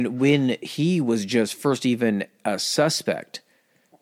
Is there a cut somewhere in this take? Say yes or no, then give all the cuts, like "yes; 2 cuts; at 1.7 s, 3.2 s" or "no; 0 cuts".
no; 0 cuts